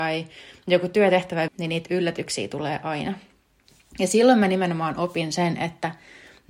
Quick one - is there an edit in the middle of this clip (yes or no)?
yes